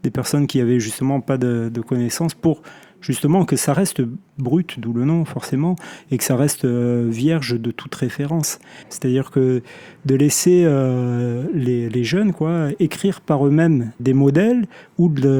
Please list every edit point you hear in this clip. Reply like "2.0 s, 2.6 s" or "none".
8.8 s, 14.0 s

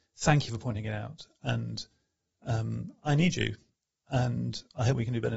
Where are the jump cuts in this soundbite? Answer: none

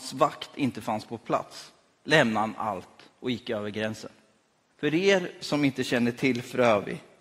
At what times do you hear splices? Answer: 4.7 s

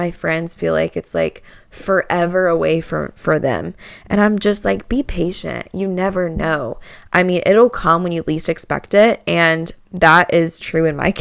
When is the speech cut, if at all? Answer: none

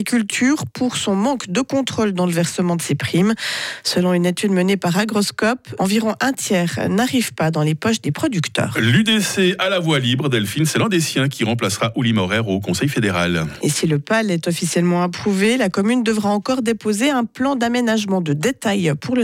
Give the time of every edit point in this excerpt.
5.8 s, 13.6 s

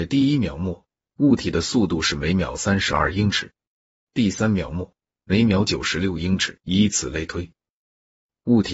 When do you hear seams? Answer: 4.1 s, 6.6 s

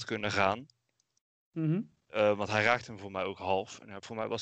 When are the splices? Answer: none

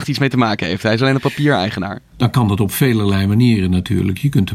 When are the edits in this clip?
2.1 s

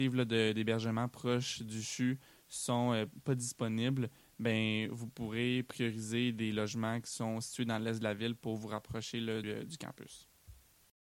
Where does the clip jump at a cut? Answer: 9.4 s

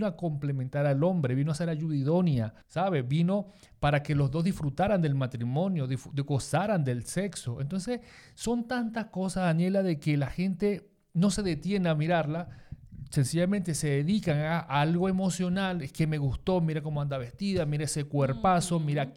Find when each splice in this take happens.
2.6 s

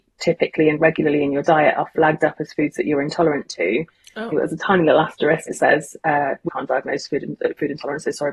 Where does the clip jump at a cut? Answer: 4.3 s, 5.5 s, 6.5 s

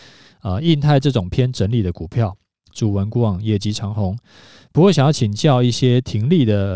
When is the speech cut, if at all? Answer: 2.7 s

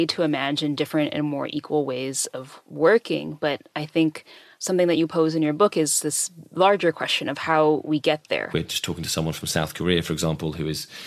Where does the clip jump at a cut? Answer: 8.5 s

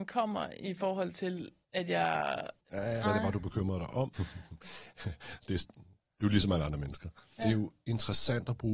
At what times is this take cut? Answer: 3.0 s, 4.1 s, 7.4 s

